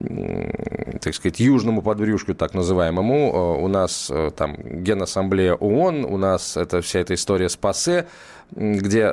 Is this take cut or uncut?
uncut